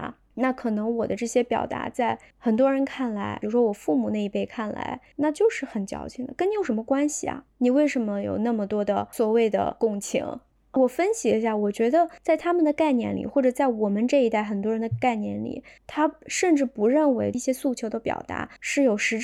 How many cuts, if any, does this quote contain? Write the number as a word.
zero